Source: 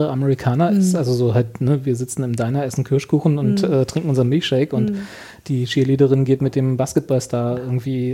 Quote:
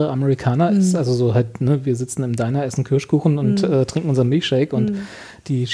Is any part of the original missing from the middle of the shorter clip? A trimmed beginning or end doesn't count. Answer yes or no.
no